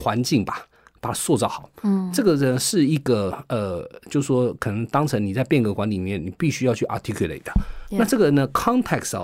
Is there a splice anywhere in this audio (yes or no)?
no